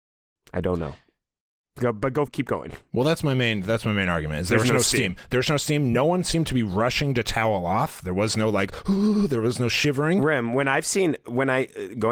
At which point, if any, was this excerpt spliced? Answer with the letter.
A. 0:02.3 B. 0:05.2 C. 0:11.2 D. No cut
A